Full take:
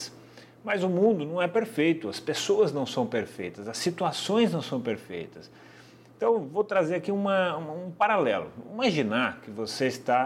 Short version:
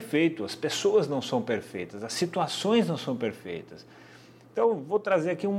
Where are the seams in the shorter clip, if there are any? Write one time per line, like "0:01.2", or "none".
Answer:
none

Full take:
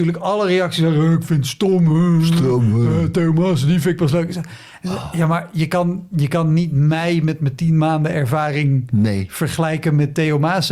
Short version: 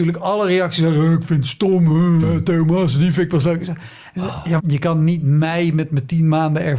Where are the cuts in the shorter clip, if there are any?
0:02.2
0:04.6

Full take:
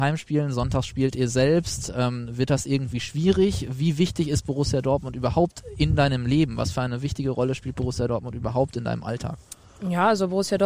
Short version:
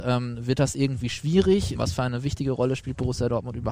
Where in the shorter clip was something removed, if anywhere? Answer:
0:01.8

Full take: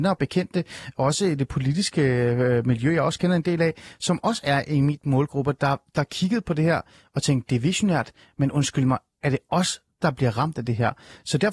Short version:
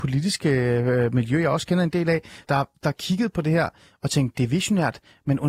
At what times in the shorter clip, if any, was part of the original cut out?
0:02.4

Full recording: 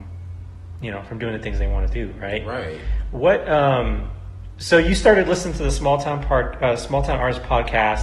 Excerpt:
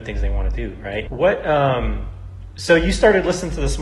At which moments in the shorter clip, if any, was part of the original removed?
0:01.1

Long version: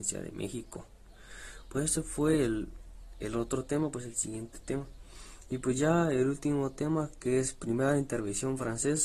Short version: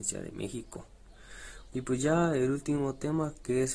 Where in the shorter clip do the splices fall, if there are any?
0:01.7

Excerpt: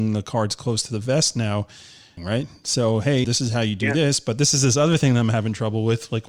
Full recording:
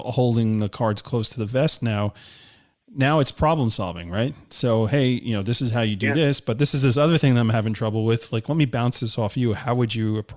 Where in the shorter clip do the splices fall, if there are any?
0:02.2
0:03.2

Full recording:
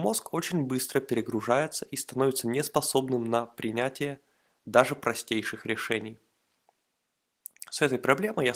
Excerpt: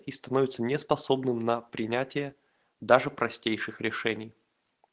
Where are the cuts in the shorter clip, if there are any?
none

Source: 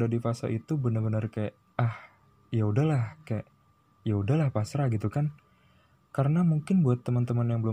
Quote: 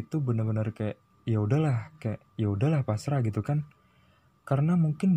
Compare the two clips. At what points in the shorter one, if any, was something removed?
0:01.1
0:02.3

